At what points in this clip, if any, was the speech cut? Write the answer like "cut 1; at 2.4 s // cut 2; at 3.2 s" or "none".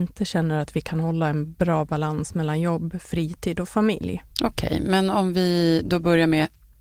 cut 1; at 4.3 s

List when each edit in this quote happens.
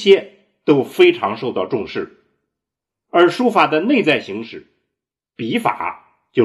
none

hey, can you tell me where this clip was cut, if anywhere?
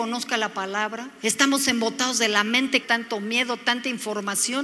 cut 1; at 1.2 s // cut 2; at 2.8 s

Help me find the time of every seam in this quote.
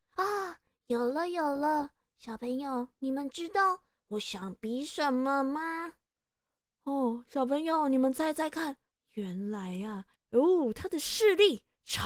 cut 1; at 8.9 s // cut 2; at 10.1 s

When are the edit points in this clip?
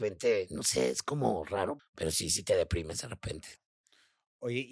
cut 1; at 1.8 s

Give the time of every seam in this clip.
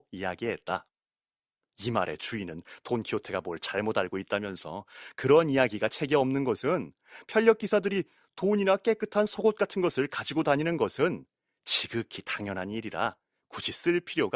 cut 1; at 1.6 s

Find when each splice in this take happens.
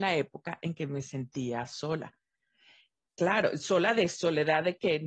none

